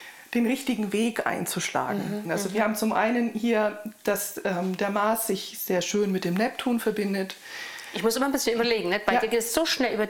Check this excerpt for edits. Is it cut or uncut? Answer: cut